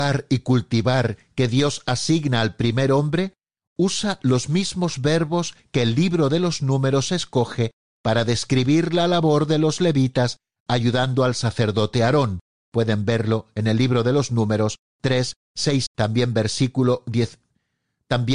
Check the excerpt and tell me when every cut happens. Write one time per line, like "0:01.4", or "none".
0:15.9